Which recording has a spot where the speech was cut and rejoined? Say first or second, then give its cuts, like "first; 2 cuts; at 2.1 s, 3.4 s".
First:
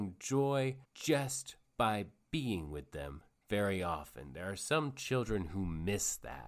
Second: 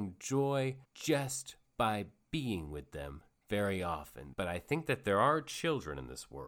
second; 1 cut; at 4.3 s